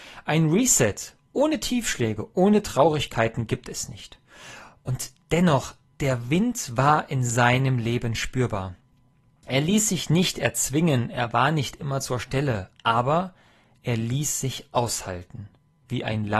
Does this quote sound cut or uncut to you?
uncut